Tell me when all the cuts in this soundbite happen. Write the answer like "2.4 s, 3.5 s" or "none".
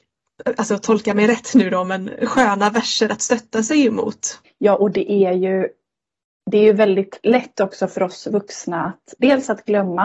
4.4 s